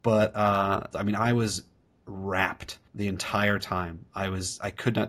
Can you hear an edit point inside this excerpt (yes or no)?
yes